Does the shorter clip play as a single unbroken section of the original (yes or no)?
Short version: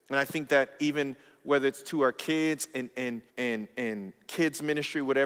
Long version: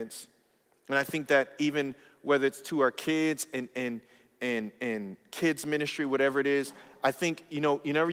no